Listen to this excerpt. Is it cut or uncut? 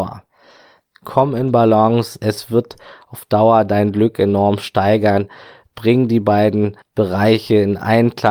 uncut